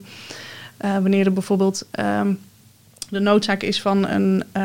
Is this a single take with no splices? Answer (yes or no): yes